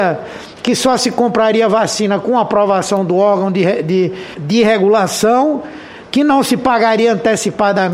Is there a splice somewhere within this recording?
no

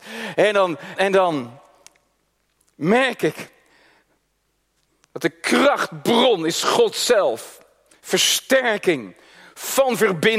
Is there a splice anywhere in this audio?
yes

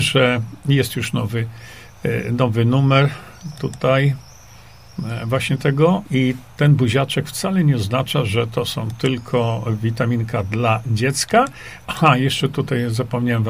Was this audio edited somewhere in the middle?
yes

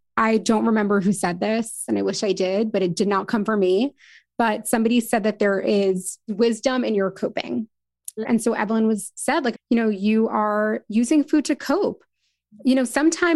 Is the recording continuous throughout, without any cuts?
no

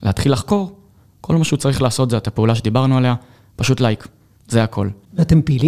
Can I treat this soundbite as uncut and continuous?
yes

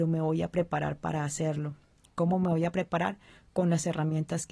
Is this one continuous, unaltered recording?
yes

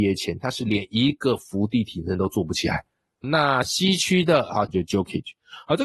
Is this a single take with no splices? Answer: no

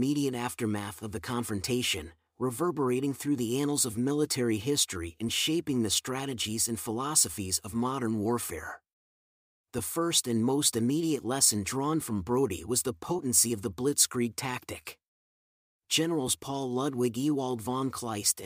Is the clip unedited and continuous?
yes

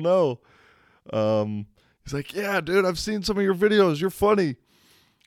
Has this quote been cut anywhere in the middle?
no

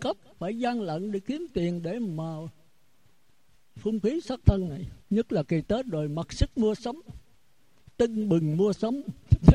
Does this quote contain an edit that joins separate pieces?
yes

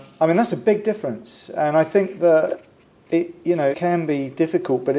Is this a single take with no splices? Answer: no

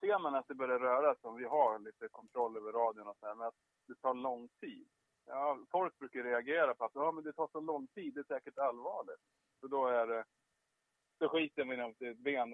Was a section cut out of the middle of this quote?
yes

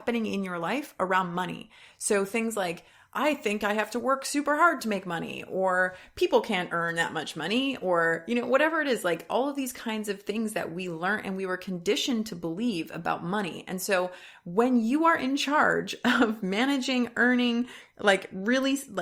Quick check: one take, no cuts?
yes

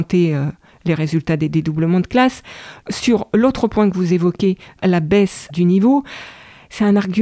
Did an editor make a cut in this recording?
yes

